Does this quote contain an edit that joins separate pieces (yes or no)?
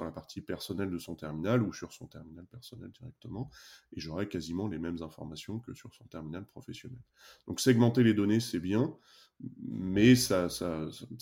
no